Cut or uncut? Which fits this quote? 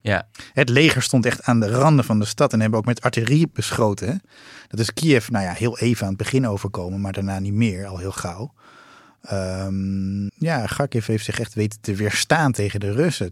cut